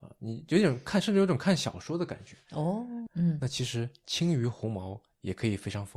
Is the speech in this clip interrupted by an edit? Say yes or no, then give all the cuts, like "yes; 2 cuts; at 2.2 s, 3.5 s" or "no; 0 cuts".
yes; 1 cut; at 3.1 s